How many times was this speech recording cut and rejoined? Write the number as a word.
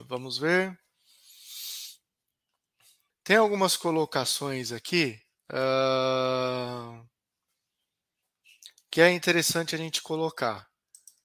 one